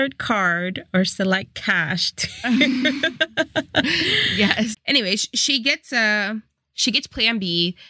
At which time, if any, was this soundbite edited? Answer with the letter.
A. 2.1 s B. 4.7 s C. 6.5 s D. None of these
B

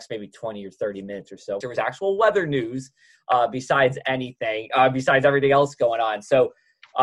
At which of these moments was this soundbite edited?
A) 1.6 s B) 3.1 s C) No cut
A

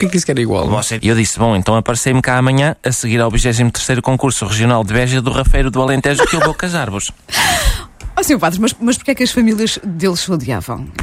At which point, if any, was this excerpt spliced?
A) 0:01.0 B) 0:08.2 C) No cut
A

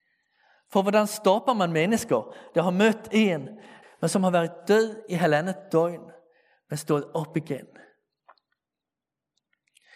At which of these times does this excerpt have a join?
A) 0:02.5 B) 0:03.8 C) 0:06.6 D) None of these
B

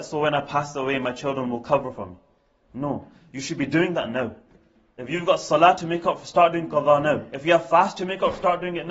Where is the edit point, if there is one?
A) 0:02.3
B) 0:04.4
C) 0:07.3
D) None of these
D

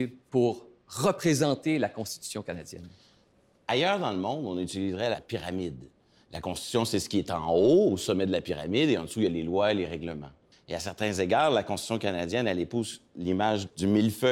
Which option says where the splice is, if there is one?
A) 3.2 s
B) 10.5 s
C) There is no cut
B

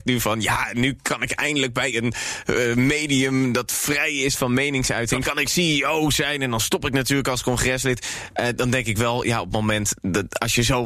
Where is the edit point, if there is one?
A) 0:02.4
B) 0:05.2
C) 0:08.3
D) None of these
B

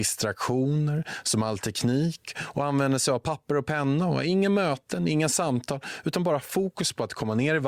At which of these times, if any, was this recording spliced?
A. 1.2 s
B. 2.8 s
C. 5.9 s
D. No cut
D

